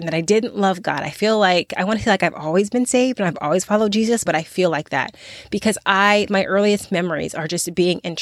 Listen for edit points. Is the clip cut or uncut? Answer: cut